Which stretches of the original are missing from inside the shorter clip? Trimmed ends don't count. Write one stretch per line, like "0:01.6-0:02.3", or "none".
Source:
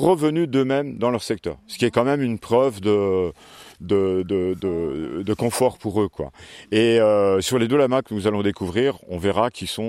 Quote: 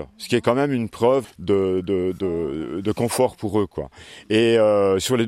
0:02.7-0:03.7